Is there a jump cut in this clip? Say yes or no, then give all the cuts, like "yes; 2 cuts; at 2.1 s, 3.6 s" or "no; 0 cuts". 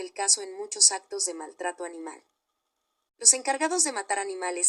no; 0 cuts